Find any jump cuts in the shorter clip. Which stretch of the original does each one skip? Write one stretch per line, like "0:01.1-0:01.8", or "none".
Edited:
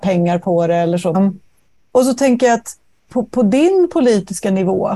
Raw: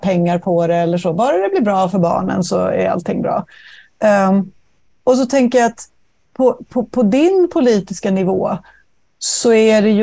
0:01.1-0:04.3
0:06.2-0:06.7